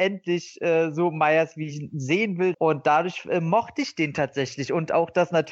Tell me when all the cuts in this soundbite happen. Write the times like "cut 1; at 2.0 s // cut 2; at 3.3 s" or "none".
cut 1; at 2.5 s